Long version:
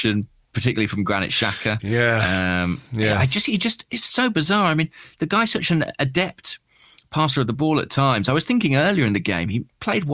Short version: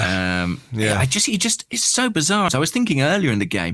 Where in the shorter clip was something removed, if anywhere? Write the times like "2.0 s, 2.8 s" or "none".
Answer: 2.5 s